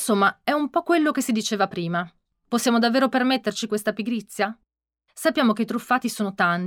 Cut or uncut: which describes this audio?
uncut